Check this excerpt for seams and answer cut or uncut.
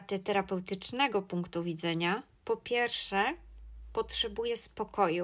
uncut